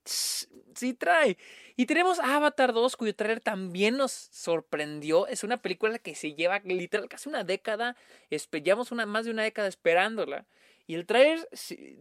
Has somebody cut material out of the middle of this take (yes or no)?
no